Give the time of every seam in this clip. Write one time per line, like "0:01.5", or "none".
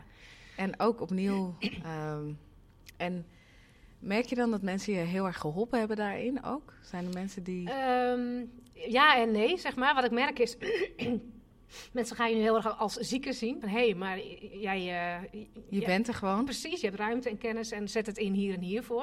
0:13.6